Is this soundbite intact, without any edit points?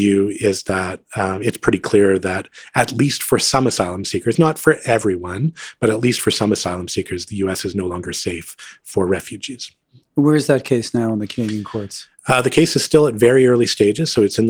yes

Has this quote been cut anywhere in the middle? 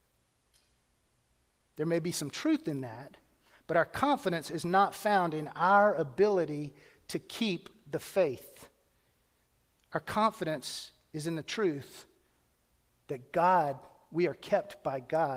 no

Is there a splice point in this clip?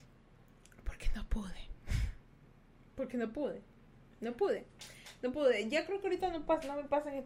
no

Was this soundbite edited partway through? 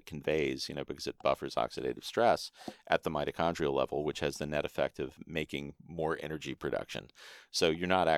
no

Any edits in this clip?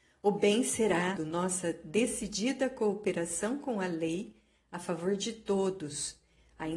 yes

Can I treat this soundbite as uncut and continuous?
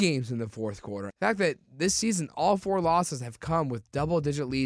no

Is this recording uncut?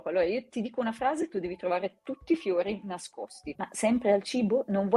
no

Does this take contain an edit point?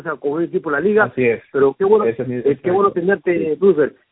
no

